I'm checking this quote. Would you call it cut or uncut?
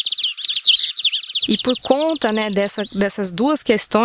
uncut